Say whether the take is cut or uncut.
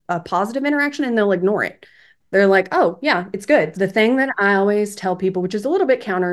cut